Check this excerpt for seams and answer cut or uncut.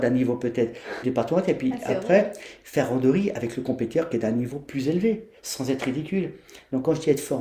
cut